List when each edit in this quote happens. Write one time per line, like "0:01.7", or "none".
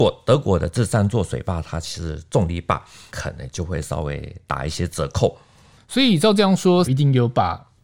0:03.1
0:06.8